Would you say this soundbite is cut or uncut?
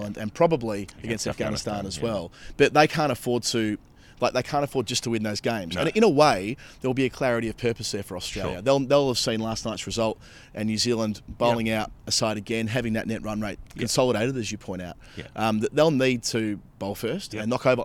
uncut